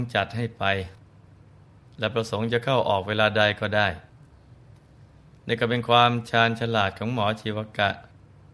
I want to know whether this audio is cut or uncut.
uncut